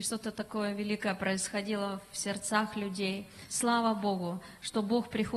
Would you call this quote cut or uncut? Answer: uncut